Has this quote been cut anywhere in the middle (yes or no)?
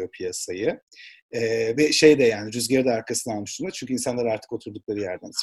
yes